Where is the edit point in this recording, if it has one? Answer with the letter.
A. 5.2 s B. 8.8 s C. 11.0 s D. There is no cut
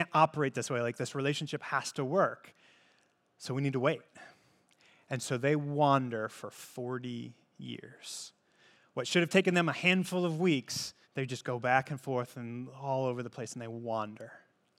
C